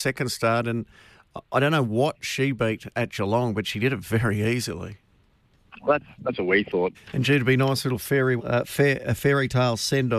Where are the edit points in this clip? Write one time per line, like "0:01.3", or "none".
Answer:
0:06.9
0:08.4